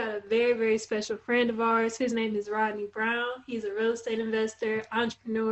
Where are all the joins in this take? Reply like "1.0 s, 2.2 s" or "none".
none